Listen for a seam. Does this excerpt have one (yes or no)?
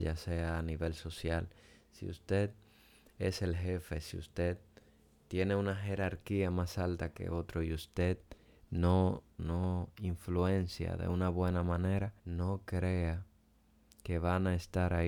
yes